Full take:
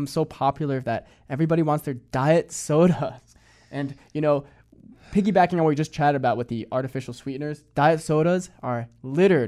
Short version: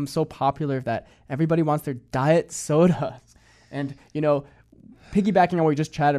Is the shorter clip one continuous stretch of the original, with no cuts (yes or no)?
yes